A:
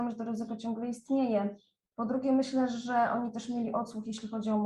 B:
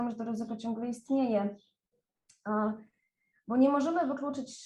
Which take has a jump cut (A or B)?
A